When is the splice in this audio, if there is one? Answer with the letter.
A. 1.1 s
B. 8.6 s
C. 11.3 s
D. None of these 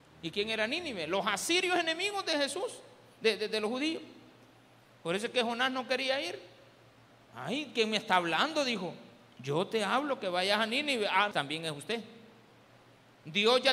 C